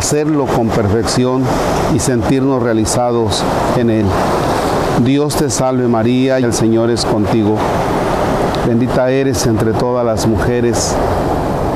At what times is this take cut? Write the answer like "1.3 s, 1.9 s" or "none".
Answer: 6.4 s